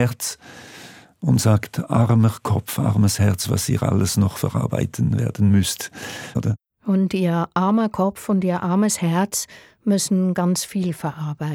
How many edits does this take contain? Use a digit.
1